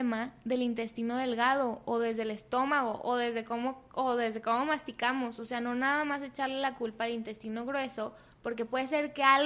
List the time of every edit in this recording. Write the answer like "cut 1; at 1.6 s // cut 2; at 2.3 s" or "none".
none